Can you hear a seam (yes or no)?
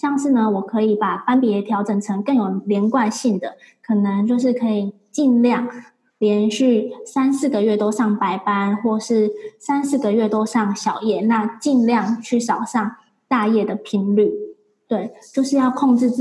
no